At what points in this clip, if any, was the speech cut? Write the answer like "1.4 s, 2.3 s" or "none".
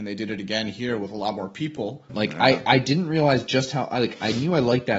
2.1 s